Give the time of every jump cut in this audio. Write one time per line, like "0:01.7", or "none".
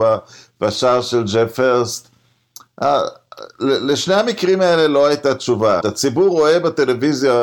0:05.8